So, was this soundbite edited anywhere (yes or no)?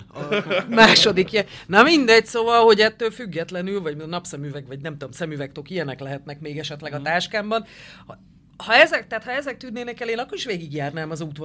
no